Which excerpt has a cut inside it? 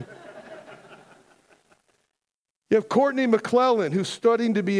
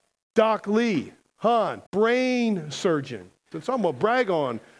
second; 2 cuts; at 1.9 s, 3.5 s

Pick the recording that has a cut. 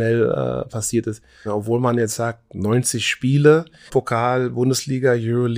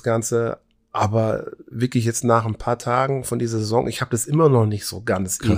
first; 2 cuts; at 1.5 s, 3.9 s

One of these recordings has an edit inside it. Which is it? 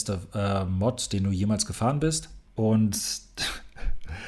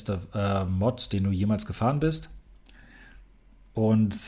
first; 1 cut; at 2.5 s

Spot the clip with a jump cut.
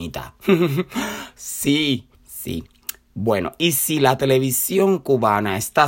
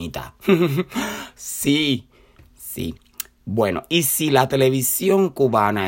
first; 1 cut; at 2.1 s

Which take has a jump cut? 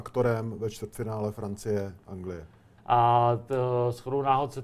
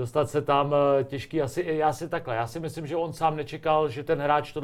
first; 1 cut; at 2.8 s

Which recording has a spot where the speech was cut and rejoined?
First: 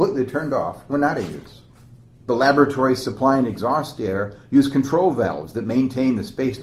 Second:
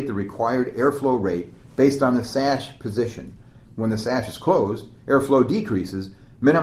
second; 1 cut; at 3.6 s

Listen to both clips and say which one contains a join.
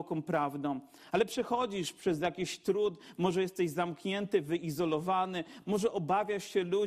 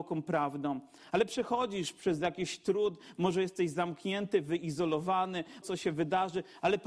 second; 1 cut; at 5.6 s

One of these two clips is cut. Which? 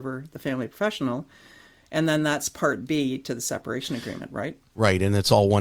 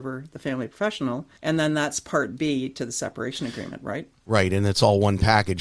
second; 1 cut; at 1.4 s

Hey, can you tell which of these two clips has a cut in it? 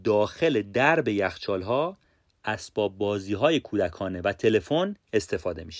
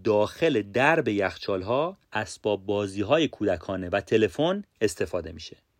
second; 1 cut; at 2.0 s

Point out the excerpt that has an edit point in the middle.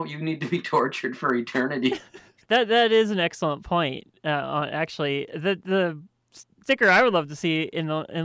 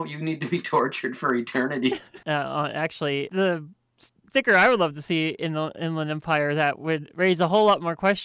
second; 2 cuts; at 2.2 s, 3.3 s

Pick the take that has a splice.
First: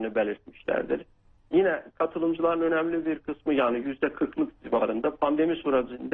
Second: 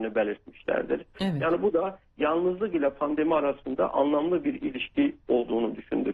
second; 1 cut; at 1.1 s

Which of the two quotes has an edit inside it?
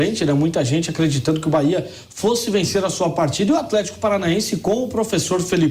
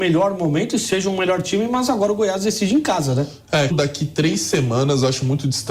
second; 1 cut; at 3.7 s

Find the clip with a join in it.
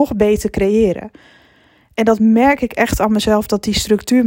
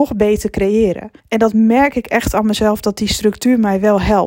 second; 1 cut; at 1.2 s

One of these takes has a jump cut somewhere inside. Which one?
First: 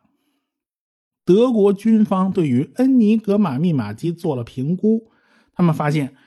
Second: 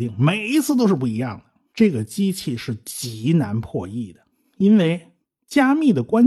second; 1 cut; at 1.7 s

